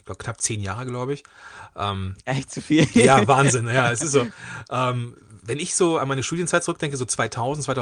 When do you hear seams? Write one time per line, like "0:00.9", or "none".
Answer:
none